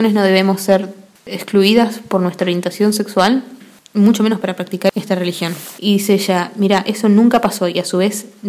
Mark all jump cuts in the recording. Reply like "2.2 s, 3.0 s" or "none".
5.8 s

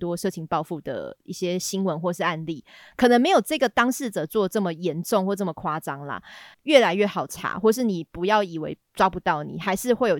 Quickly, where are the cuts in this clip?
6.5 s

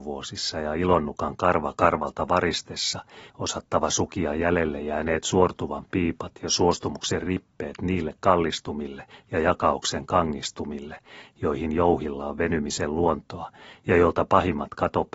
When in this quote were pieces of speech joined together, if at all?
3.3 s

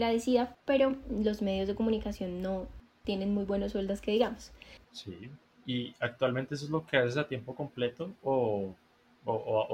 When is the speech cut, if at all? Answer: 4.8 s

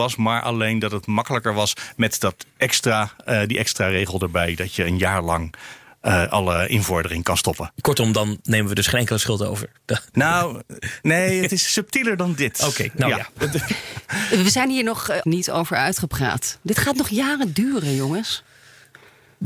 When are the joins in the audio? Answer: 15.2 s

